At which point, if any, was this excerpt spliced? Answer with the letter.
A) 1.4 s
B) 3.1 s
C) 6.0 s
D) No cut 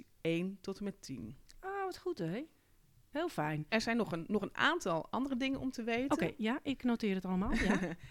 B